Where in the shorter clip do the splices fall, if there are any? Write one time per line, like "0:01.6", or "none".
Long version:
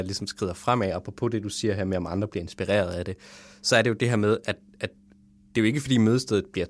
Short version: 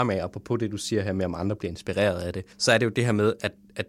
0:02.5